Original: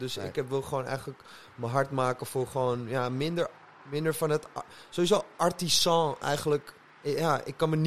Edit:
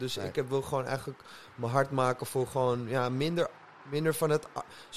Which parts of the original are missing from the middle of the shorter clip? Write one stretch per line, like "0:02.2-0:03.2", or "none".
none